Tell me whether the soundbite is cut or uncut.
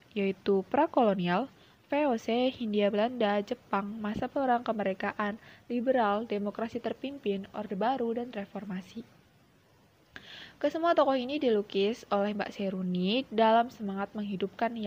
uncut